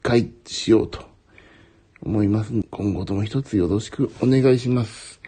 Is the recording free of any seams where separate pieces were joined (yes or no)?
no